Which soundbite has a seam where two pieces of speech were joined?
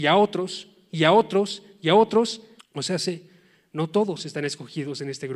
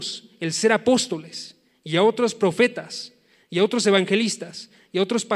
first; 1 cut; at 2.6 s

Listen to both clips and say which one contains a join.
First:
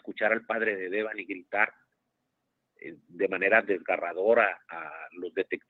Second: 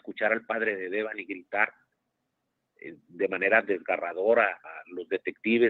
second; 1 cut; at 4.6 s

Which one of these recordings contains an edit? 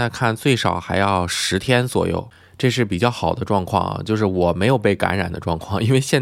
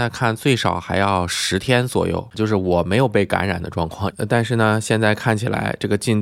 second; 2 cuts; at 2.3 s, 4.1 s

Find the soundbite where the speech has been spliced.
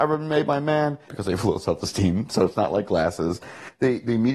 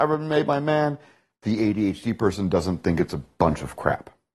first; 1 cut; at 1.1 s

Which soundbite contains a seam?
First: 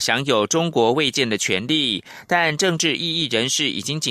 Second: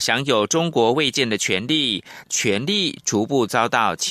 second; 1 cut; at 2.2 s

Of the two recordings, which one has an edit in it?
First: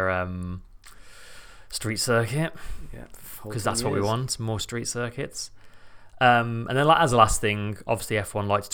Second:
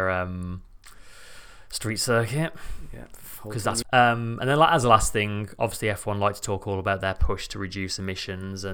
second; 1 cut; at 3.8 s

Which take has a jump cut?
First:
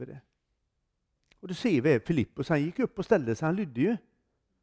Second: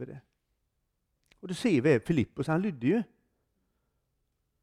second; 1 cut; at 2.5 s

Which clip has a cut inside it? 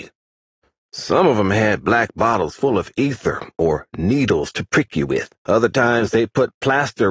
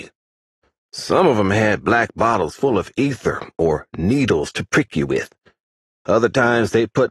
first; 1 cut; at 5.4 s

